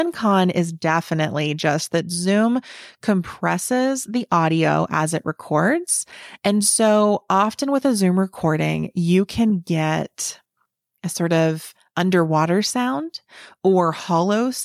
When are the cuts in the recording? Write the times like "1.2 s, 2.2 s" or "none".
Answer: none